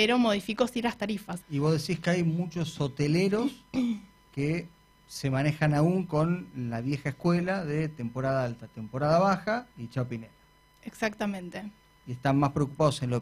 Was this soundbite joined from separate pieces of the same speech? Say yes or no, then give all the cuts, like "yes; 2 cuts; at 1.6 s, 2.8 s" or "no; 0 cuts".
yes; 2 cuts; at 1.4 s, 9.7 s